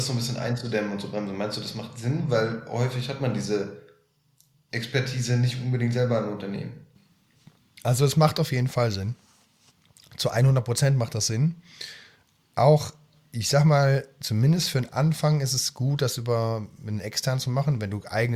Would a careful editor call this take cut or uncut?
uncut